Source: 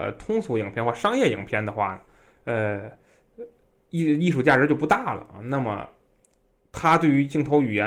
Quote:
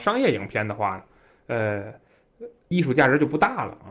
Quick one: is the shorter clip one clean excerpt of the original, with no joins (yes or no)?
no